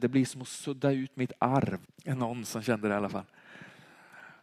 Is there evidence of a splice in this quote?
yes; 1 cut; at 1.8 s

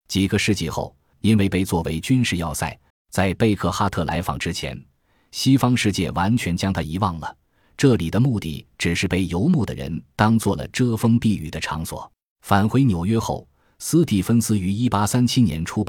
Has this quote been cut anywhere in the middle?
yes; 3 cuts; at 1.1 s, 2.9 s, 12.3 s

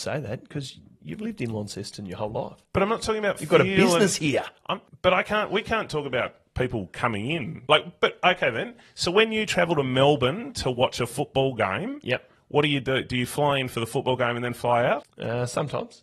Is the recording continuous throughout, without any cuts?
yes; 0 cuts

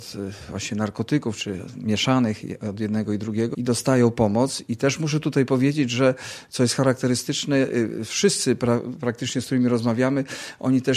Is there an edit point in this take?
yes; 1 cut; at 3.5 s

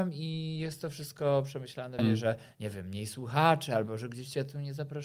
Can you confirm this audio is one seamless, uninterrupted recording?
no; 1 cut; at 2.0 s

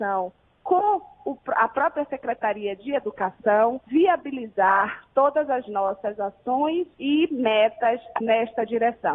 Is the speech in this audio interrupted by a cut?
yes; 2 cuts; at 3.9 s, 6.9 s

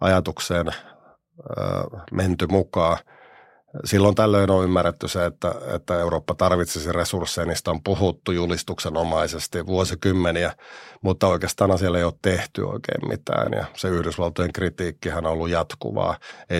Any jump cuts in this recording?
no; 0 cuts

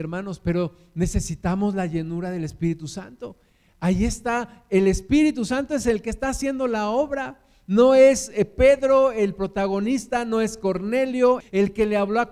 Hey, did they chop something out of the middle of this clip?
yes; 1 cut; at 11.4 s

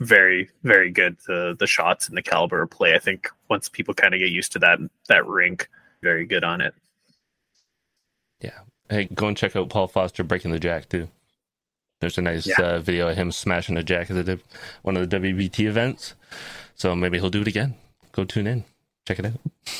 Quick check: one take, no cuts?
no; 2 cuts; at 6.0 s, 9.1 s

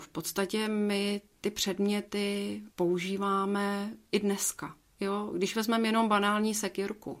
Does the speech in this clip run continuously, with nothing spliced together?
no; 1 cut; at 2.7 s

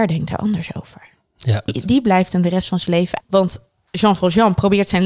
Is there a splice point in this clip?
yes; 2 cuts; at 1.7 s, 3.2 s

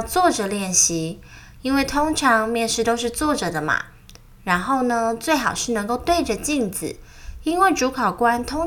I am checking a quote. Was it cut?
no; 0 cuts

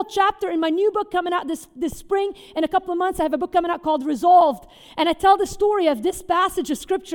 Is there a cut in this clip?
no; 0 cuts

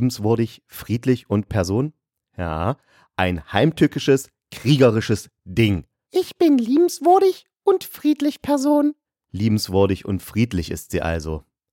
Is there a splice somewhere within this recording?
yes; 1 cut; at 6.1 s

